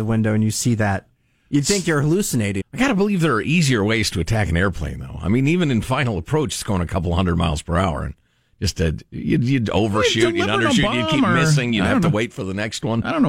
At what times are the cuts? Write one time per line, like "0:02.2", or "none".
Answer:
0:02.6